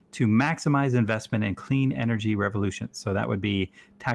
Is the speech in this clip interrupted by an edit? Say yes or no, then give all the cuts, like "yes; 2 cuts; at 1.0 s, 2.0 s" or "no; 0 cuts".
no; 0 cuts